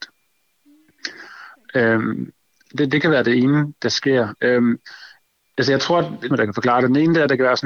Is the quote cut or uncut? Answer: cut